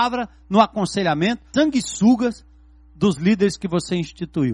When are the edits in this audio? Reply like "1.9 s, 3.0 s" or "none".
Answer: 1.5 s